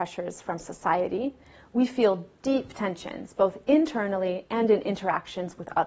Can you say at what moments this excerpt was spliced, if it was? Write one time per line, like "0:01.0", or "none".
none